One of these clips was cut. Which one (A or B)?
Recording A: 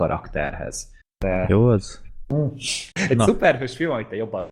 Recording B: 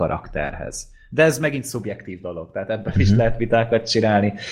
A